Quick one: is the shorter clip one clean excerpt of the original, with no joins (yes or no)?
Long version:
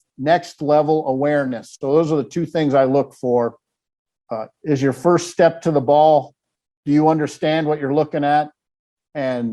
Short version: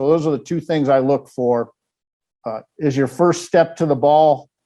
yes